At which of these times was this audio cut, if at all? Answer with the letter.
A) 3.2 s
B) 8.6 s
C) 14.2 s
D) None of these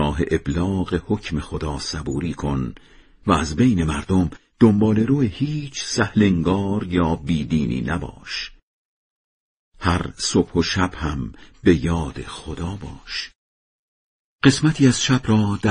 D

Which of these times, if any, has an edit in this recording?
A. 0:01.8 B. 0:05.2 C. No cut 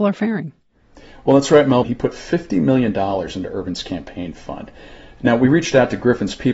A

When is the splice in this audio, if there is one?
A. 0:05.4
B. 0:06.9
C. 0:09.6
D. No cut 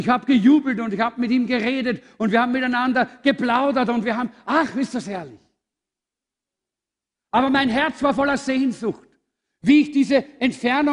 D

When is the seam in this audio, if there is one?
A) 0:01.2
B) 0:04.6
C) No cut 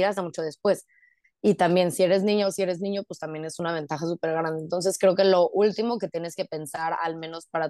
A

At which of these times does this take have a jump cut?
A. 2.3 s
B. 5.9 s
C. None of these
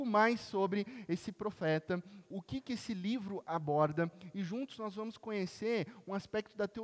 A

